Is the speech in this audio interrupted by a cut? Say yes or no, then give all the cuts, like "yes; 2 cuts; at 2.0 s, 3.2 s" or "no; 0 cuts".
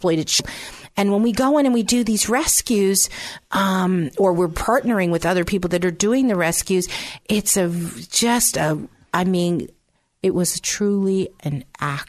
no; 0 cuts